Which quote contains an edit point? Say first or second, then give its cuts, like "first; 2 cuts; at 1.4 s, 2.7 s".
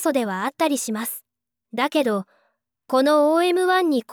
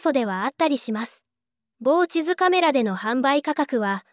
second; 1 cut; at 1.6 s